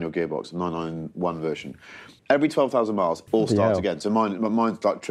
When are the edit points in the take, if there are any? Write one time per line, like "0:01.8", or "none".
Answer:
0:02.2
0:03.3